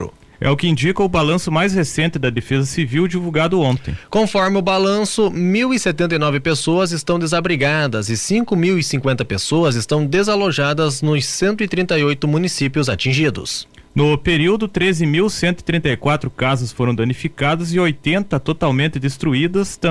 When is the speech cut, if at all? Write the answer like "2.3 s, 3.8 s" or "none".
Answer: none